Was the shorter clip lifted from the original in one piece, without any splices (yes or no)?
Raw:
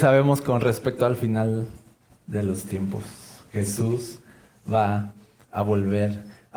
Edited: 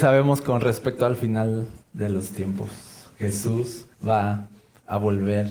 no